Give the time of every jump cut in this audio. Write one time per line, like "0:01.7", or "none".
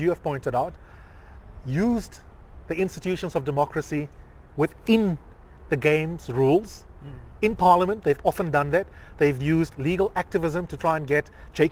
none